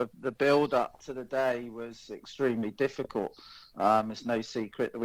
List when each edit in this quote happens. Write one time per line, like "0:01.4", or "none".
none